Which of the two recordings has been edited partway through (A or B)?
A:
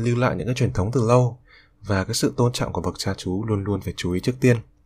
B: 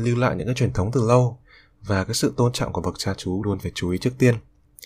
B